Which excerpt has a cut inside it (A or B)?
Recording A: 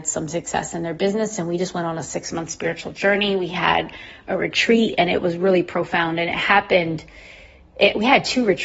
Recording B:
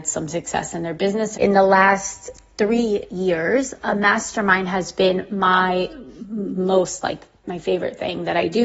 B